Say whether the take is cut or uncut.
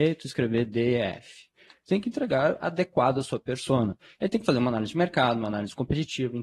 uncut